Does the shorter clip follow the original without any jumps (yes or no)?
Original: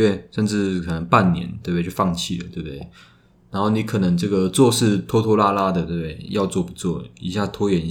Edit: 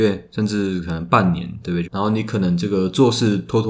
no